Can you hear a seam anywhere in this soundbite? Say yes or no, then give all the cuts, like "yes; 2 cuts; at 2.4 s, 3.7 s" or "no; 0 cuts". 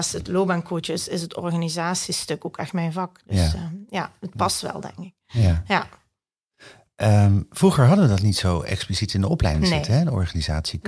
no; 0 cuts